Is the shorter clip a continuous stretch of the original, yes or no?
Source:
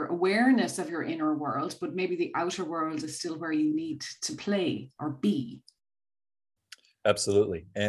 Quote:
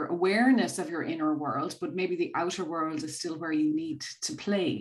yes